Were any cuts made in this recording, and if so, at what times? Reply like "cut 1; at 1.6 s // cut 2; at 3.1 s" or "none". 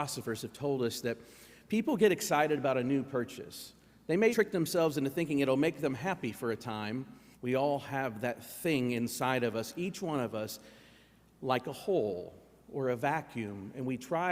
cut 1; at 4.3 s // cut 2; at 7.3 s